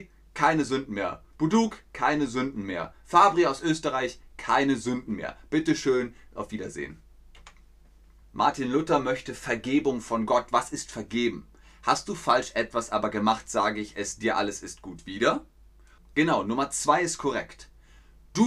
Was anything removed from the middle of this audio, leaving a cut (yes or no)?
yes